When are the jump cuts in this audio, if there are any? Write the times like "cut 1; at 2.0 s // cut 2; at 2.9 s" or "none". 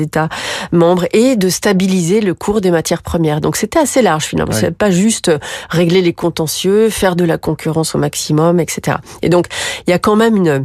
none

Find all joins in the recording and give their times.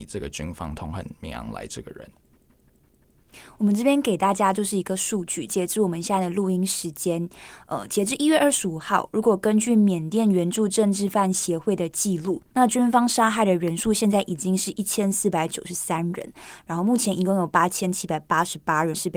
cut 1; at 12.5 s

